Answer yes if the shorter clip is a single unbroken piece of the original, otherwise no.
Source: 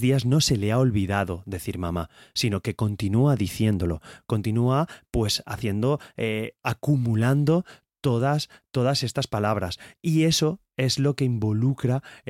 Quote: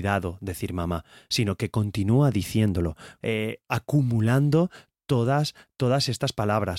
no